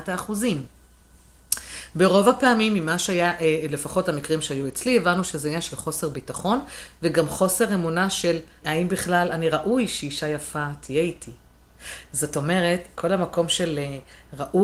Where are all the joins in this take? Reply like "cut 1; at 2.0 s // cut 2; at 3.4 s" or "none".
cut 1; at 8.6 s // cut 2; at 12.9 s